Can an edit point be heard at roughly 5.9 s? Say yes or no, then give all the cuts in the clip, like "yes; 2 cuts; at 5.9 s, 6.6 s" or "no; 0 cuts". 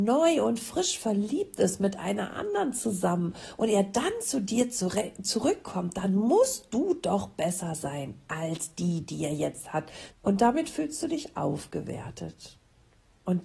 no; 1 cut; at 10.1 s